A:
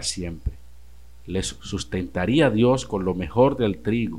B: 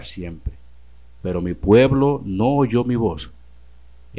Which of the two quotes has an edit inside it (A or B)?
B